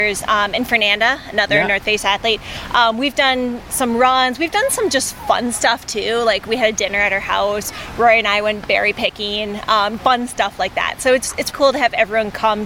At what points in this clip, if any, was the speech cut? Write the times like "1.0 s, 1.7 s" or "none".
10.0 s, 11.5 s